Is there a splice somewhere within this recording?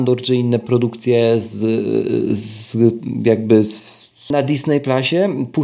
yes; 1 cut; at 4.3 s

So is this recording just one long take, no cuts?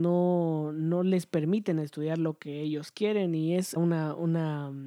no; 1 cut; at 3.8 s

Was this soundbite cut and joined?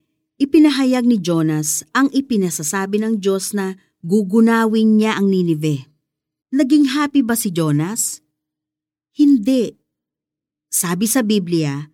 yes; 1 cut; at 6.4 s

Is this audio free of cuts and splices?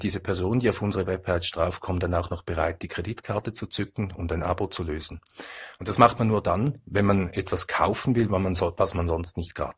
yes; 0 cuts

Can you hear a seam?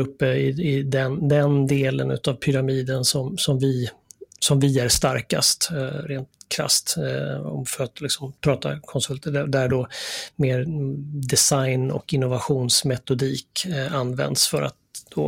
yes; 1 cut; at 8.4 s

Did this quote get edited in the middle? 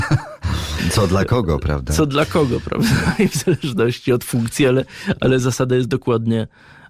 no; 0 cuts

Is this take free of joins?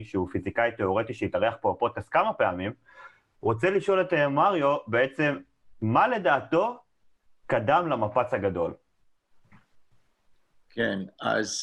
no; 1 cut; at 10.6 s

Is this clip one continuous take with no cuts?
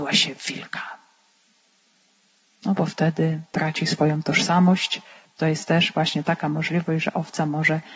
yes; 0 cuts

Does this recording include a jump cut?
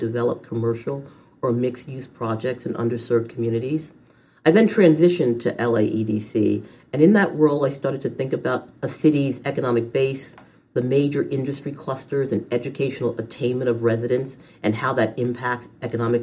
no; 0 cuts

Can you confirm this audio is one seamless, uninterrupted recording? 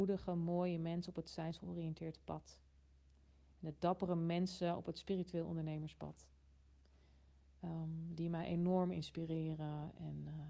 yes; 0 cuts

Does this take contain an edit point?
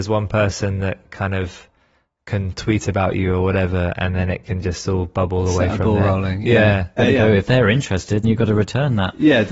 yes; 2 cuts; at 7.0 s, 8.2 s

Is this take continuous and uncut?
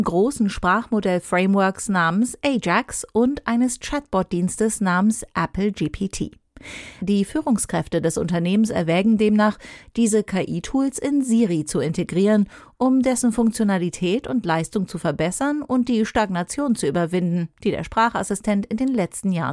no; 1 cut; at 7.0 s

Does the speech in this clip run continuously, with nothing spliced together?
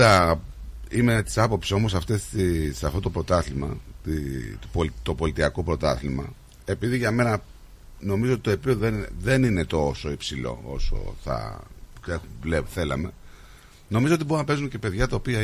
yes; 0 cuts

